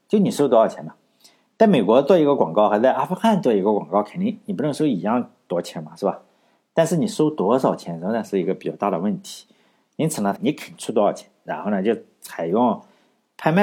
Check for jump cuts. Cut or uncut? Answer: cut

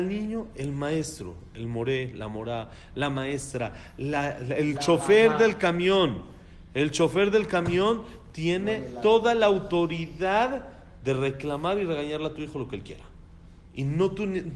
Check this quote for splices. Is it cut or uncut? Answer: uncut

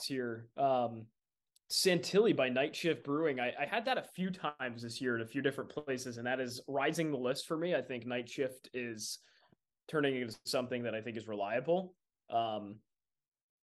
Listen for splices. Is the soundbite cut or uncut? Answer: uncut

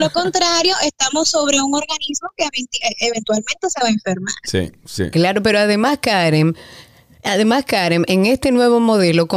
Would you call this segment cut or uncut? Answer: uncut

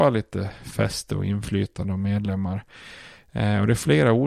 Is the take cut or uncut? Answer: uncut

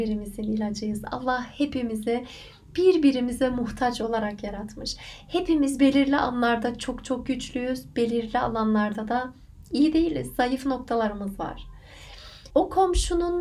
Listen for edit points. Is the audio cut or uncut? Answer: cut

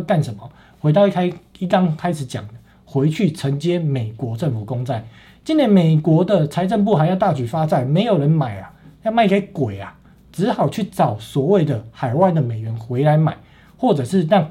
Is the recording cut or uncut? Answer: uncut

